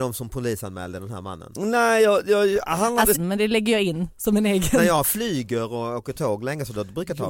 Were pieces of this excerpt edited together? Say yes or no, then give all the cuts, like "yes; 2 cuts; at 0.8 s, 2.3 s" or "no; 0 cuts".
yes; 1 cut; at 3.1 s